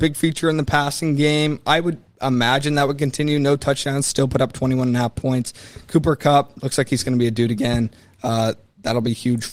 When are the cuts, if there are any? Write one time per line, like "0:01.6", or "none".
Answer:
none